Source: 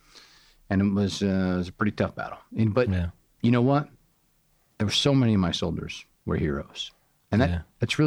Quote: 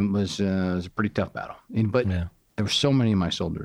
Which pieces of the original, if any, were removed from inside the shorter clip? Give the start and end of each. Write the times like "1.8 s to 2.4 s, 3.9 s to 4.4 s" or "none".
3.3 s to 4.7 s